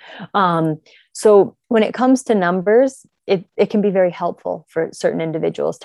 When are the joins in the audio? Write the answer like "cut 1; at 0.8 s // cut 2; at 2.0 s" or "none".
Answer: cut 1; at 1.6 s